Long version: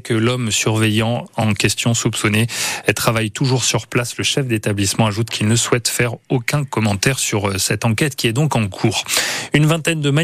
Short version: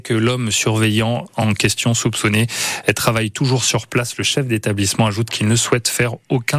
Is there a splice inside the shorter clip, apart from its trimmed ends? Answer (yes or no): no